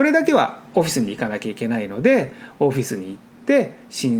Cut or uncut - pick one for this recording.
uncut